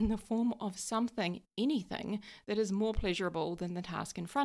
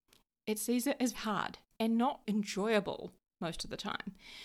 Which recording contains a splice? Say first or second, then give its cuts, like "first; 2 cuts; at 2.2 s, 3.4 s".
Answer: second; 2 cuts; at 1.1 s, 2.2 s